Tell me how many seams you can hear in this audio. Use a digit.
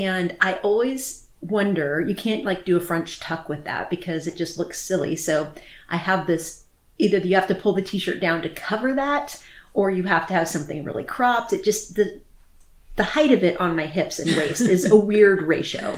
0